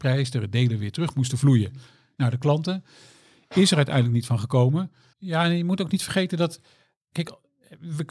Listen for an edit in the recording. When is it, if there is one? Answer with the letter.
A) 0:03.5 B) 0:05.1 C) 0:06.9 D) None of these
B